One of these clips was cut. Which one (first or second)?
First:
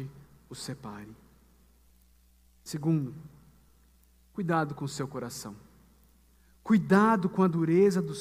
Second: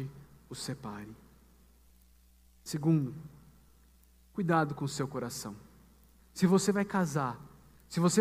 second